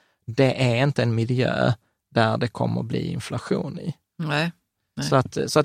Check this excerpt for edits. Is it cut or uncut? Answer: uncut